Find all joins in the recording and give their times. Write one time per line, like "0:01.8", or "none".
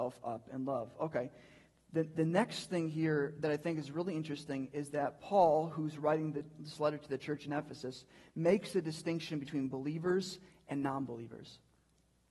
none